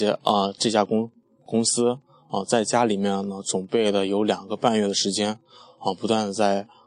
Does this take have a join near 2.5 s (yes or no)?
no